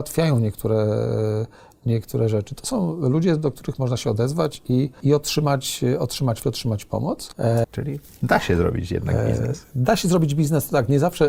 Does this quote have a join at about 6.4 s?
yes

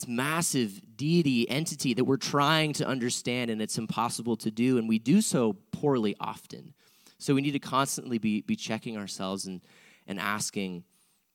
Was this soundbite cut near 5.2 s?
no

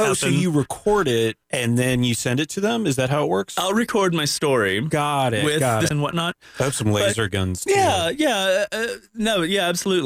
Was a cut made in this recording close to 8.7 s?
no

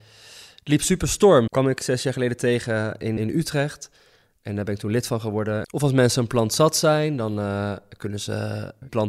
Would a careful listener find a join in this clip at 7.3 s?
no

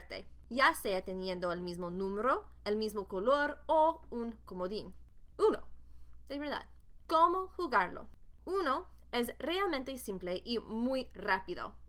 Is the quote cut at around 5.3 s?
yes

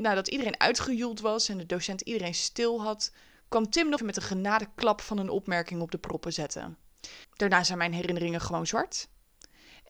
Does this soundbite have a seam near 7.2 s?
yes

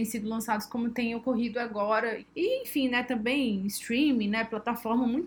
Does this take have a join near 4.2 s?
no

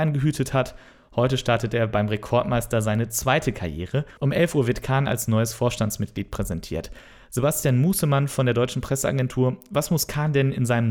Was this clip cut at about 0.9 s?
no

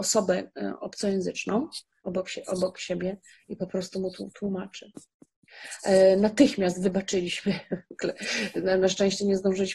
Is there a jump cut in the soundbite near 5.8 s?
no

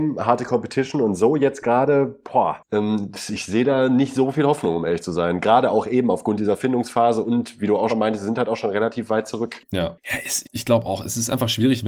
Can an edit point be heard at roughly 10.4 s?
yes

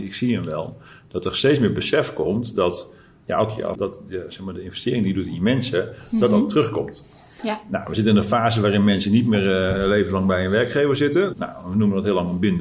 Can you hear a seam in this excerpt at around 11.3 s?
yes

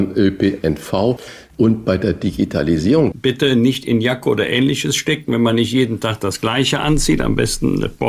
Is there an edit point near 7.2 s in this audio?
no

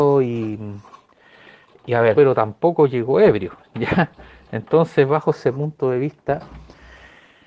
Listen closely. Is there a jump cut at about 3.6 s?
no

